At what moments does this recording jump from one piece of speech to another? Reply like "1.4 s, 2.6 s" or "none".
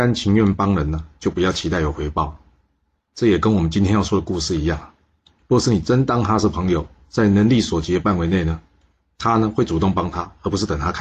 5.4 s